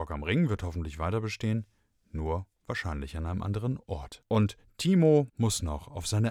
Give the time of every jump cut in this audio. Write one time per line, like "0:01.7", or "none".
0:04.2
0:05.3